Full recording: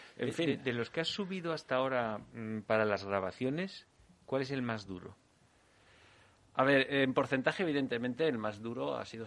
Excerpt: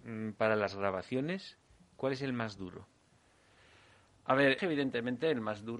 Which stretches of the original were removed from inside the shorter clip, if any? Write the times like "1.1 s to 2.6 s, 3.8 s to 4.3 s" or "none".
6.9 s to 7.6 s